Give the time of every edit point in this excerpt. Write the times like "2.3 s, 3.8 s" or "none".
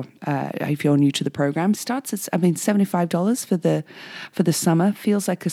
1.7 s